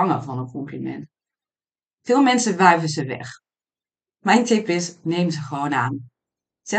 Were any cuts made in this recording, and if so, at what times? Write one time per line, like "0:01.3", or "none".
none

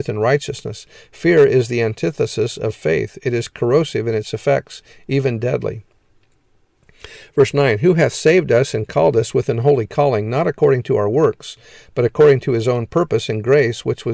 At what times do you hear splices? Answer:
none

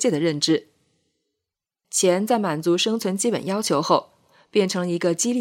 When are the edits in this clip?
0:01.8

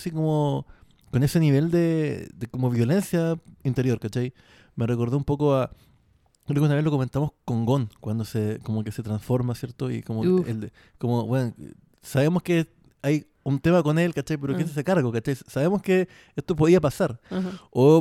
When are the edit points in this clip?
none

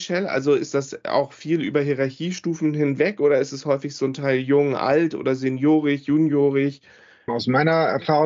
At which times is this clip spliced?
0:07.3

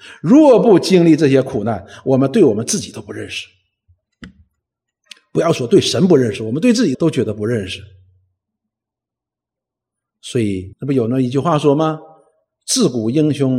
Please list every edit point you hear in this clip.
0:06.9
0:10.7

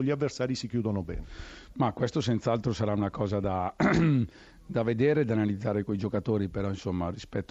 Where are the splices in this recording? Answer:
none

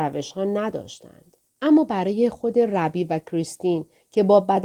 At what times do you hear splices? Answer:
0:01.5

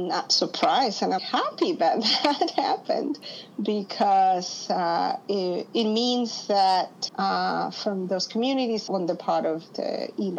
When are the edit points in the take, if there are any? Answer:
0:01.2
0:07.1
0:08.9

